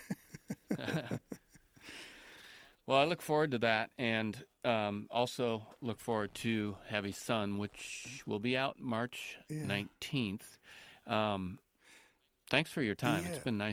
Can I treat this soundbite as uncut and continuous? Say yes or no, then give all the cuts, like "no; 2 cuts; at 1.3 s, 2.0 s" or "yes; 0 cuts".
yes; 0 cuts